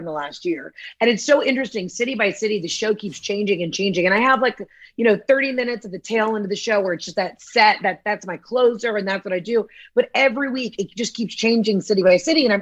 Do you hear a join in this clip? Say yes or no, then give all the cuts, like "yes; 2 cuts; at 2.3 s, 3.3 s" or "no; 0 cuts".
no; 0 cuts